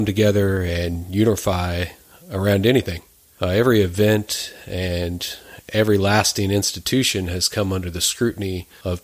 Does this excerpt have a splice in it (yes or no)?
no